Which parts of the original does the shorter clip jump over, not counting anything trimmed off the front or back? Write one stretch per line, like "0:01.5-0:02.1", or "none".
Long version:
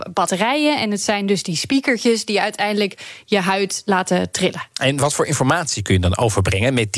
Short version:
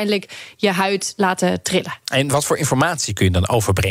none